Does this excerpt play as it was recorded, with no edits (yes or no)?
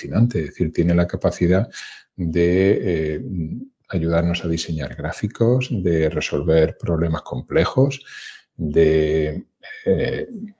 yes